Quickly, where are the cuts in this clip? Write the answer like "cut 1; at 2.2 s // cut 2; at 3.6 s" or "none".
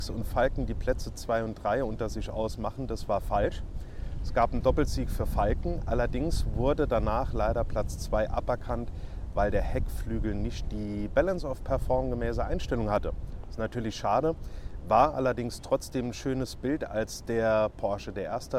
none